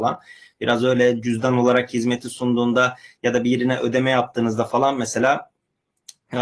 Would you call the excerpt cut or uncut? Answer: uncut